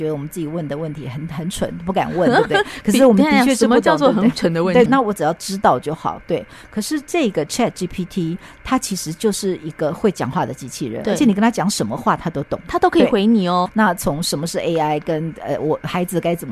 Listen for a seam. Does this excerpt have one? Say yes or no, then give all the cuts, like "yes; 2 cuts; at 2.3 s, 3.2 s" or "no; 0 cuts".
yes; 2 cuts; at 4.9 s, 13.7 s